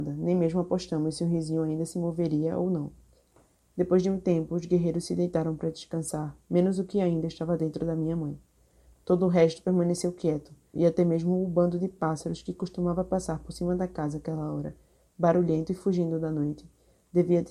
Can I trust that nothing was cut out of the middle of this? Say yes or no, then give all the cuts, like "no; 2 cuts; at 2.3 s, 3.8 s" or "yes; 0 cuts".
no; 1 cut; at 10.7 s